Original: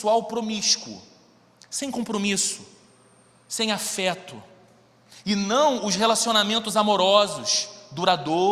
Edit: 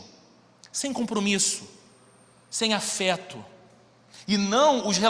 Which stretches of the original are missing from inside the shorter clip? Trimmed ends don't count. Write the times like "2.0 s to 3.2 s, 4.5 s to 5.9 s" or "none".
none